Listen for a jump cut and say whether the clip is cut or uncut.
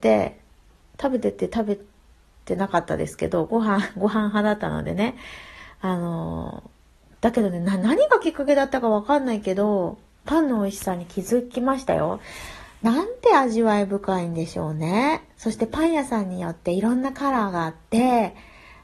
uncut